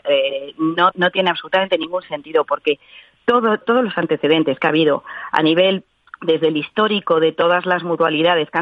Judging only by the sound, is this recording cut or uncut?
cut